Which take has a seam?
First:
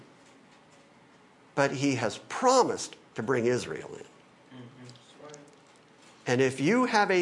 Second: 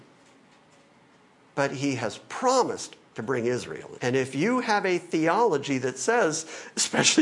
second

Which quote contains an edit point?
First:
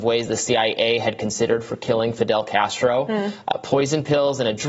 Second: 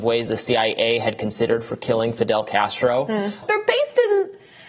second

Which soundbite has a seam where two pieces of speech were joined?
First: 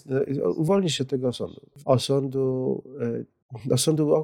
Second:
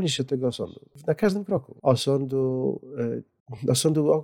first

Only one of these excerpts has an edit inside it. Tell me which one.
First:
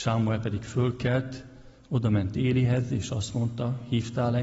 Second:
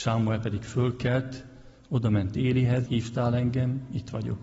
second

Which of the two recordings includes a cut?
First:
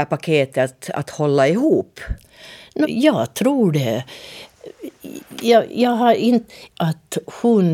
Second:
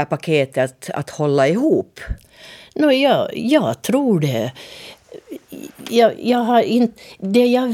first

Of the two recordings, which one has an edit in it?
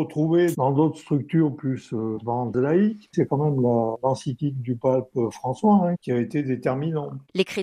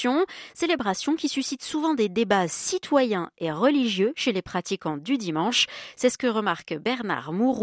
first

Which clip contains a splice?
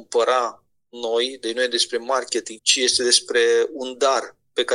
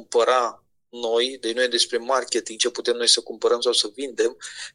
first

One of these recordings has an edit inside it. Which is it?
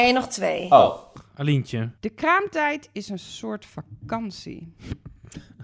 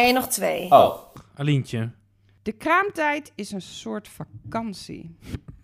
first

